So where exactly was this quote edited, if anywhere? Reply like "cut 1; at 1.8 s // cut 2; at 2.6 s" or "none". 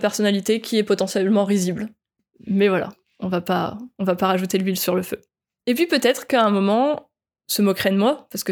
cut 1; at 2.3 s // cut 2; at 3.9 s // cut 3; at 7.4 s